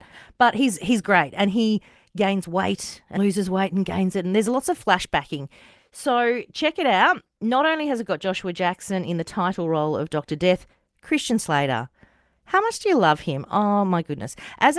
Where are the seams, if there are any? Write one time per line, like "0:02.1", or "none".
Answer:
0:03.2

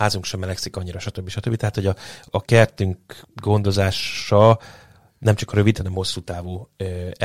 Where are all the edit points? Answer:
none

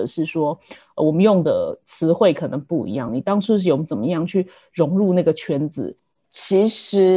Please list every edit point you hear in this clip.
none

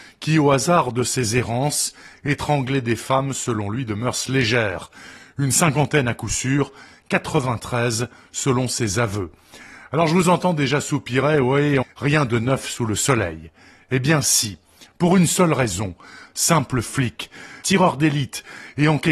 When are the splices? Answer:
0:11.8
0:16.2
0:17.6

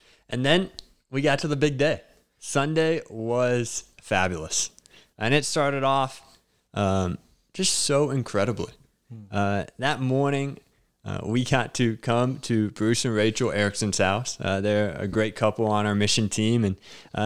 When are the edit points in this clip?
none

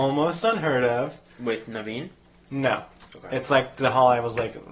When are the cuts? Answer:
none

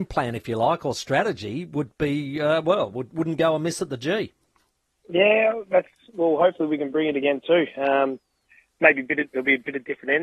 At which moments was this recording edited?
none

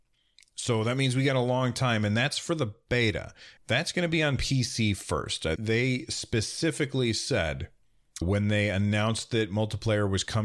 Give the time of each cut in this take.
0:03.6
0:05.6
0:08.2

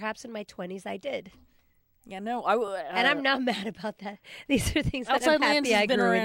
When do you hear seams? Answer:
none

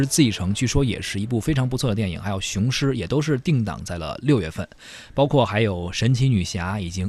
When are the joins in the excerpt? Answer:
none

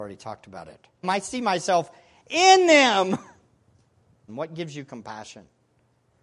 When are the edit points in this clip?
0:01.0
0:04.3

